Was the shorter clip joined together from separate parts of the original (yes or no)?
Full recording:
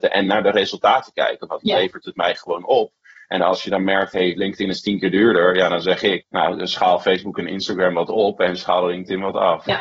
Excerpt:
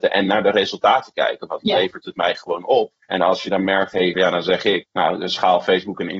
yes